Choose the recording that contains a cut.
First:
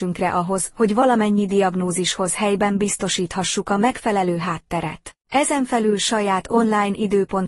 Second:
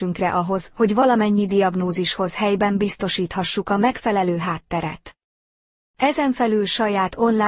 first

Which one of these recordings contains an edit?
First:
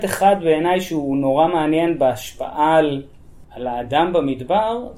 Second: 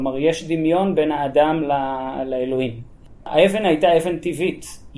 second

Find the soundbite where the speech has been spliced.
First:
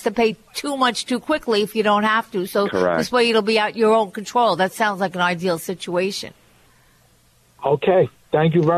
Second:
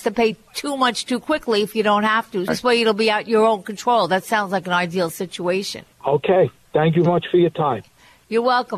second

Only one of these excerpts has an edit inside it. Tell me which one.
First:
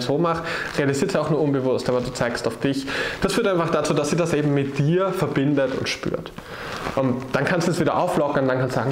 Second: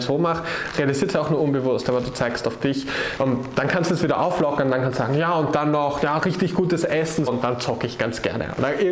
second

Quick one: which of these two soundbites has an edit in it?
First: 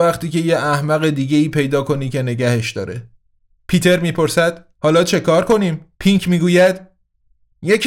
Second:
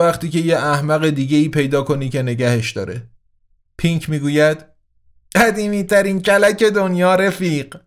first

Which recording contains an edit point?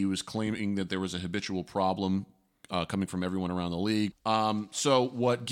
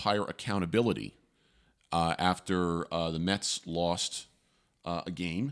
first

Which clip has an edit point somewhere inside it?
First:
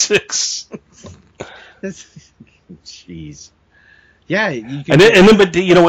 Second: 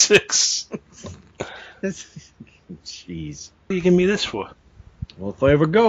second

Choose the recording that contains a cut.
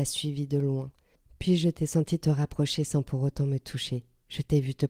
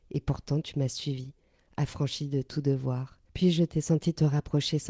second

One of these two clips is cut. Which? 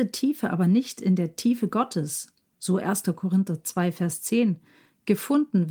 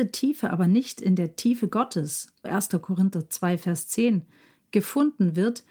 second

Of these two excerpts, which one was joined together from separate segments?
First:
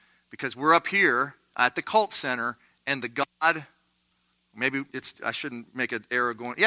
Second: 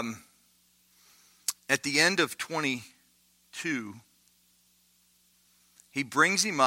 first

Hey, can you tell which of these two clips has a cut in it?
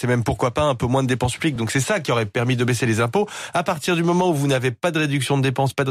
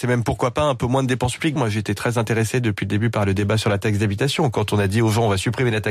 second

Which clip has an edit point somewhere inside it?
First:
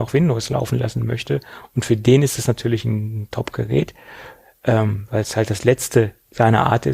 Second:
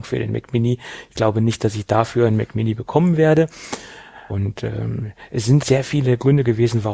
second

